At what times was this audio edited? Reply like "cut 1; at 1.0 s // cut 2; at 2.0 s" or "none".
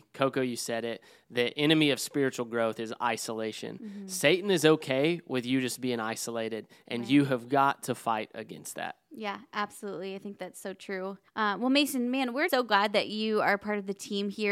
cut 1; at 11.3 s // cut 2; at 12.5 s